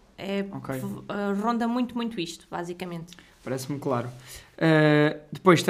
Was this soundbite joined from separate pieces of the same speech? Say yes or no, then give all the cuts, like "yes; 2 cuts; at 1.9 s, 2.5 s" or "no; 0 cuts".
no; 0 cuts